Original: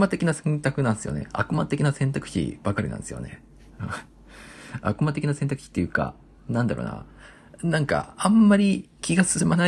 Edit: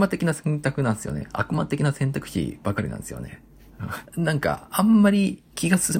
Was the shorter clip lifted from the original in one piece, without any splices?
no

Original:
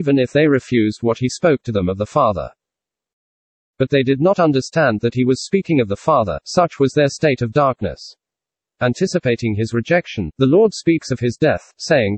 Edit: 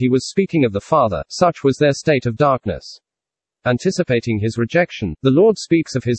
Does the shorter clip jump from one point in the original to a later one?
no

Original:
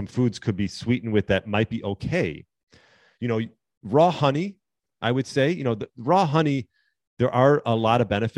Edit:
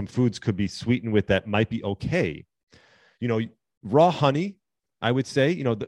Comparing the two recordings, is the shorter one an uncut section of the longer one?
yes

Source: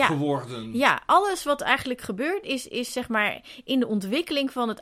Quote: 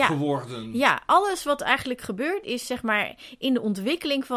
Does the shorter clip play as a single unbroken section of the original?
no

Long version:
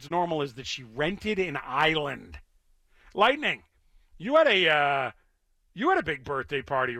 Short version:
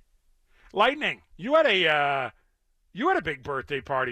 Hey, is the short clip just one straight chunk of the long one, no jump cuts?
no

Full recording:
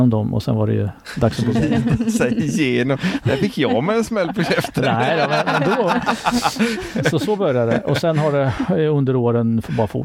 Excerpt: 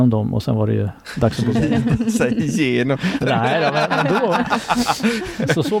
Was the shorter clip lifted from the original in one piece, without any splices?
no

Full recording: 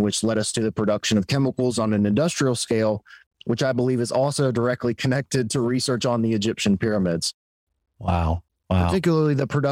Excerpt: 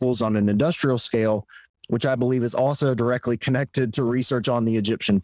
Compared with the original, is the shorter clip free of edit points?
yes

